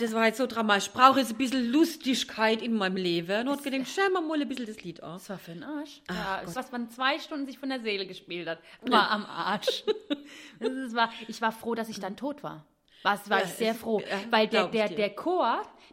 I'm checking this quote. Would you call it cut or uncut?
cut